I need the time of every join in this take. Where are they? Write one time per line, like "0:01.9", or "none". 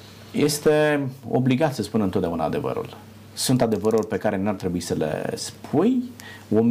none